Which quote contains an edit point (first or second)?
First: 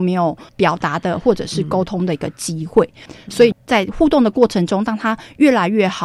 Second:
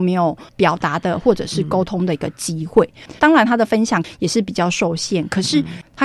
second